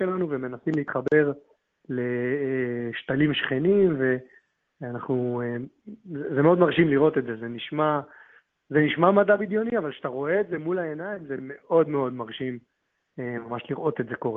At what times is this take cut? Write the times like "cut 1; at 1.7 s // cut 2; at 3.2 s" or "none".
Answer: none